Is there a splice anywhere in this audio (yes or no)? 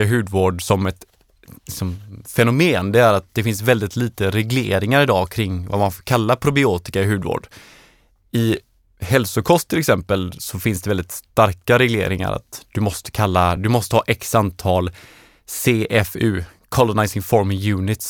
no